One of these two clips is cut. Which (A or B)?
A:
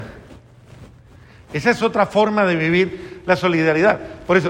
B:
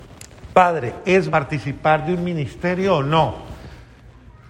B